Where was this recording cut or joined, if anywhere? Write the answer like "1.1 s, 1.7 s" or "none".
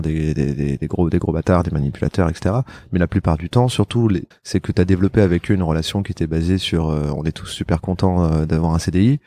4.3 s